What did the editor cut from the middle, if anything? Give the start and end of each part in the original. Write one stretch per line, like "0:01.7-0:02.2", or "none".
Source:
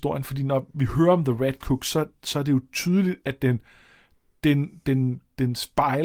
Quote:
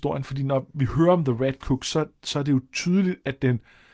none